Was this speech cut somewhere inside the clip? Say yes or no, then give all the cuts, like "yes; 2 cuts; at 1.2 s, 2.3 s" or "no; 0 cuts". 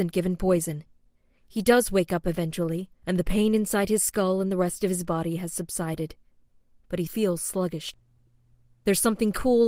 yes; 2 cuts; at 3.0 s, 7.1 s